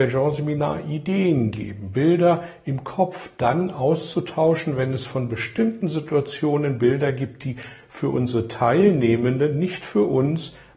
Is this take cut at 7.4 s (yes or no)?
no